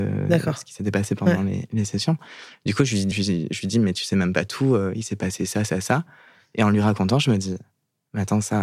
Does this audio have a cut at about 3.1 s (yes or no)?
yes